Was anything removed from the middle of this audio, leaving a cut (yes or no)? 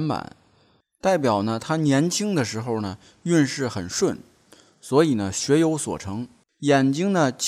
yes